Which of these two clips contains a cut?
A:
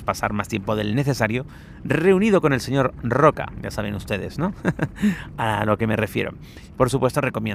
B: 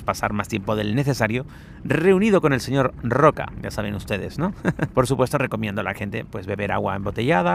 B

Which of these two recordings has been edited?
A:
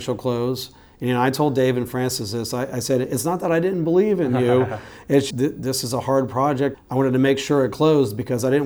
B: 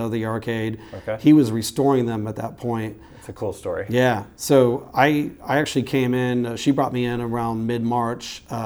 A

